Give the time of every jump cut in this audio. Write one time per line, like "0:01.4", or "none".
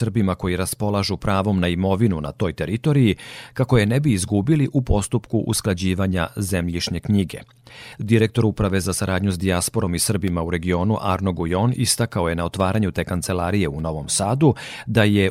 none